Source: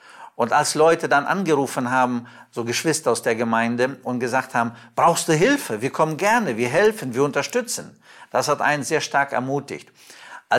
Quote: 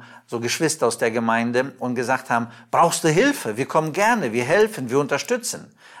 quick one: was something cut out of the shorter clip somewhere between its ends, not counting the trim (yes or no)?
no